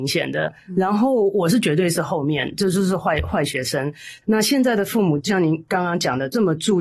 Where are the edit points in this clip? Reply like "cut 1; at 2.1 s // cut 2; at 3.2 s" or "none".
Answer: cut 1; at 4.2 s